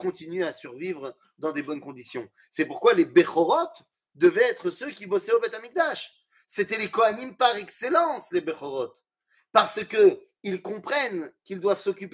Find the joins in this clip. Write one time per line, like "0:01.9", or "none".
none